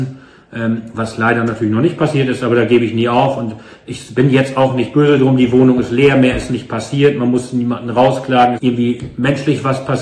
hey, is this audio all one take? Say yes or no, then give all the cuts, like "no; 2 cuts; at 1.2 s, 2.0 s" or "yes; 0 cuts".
no; 1 cut; at 8.6 s